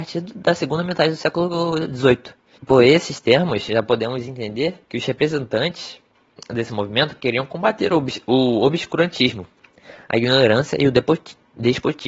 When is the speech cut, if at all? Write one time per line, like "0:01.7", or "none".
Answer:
0:02.6
0:04.8